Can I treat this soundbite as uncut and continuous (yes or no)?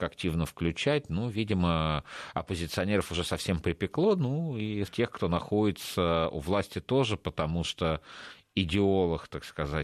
no